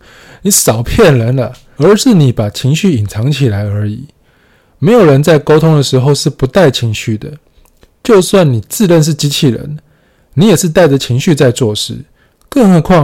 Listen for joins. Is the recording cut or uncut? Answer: cut